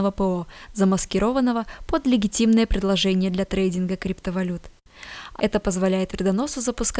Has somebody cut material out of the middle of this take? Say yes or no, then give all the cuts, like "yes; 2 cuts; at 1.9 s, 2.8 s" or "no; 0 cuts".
yes; 1 cut; at 5.4 s